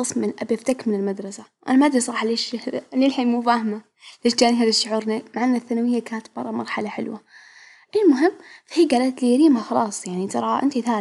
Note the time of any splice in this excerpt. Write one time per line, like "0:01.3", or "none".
none